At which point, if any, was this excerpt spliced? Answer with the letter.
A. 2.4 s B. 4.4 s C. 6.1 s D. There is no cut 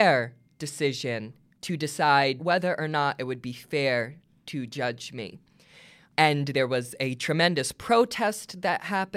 A